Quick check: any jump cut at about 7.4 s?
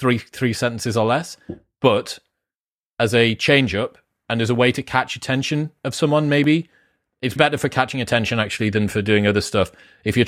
yes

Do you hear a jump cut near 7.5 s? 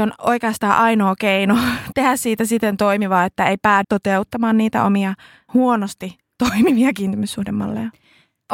no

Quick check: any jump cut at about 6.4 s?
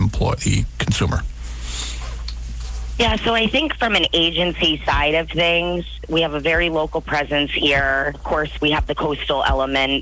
no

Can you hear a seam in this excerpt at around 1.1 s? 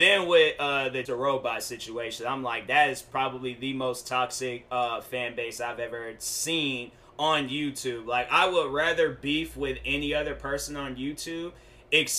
yes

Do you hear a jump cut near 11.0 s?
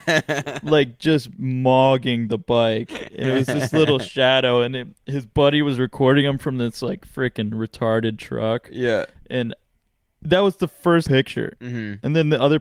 yes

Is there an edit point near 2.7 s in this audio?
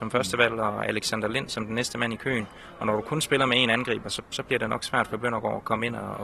no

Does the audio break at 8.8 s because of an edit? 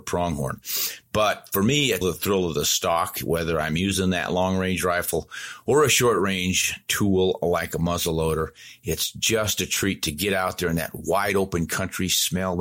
no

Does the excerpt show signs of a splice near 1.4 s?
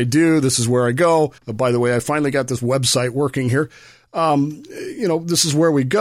yes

